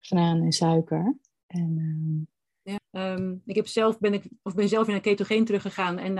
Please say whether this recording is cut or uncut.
cut